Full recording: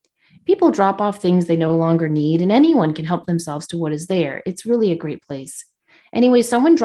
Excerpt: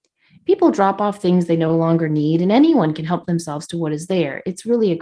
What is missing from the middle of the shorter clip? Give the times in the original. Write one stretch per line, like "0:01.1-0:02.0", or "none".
none